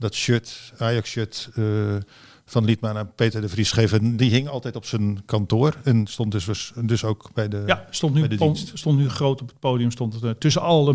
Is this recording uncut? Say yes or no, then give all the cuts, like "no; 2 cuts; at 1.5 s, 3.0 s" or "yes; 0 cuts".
yes; 0 cuts